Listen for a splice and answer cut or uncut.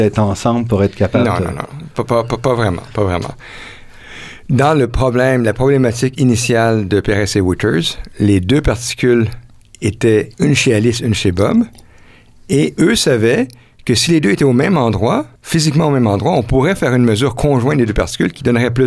cut